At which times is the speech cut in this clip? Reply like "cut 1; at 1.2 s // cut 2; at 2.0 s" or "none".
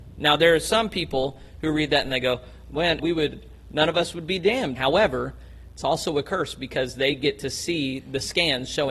cut 1; at 3.0 s // cut 2; at 4.8 s